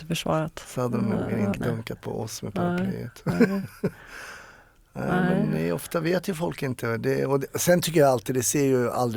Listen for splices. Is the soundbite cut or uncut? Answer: cut